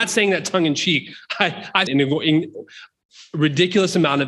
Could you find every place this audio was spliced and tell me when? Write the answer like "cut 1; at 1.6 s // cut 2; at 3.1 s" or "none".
cut 1; at 1.9 s